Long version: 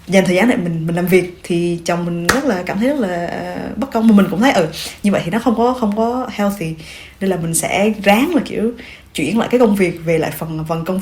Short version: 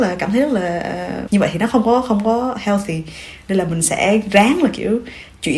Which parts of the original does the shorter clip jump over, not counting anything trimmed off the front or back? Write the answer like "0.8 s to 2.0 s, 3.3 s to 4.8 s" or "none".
3.7 s to 5.0 s